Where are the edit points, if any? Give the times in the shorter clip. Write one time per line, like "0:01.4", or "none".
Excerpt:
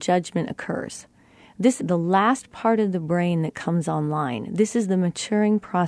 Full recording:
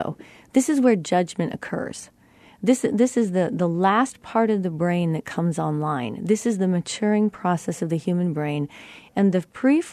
0:01.8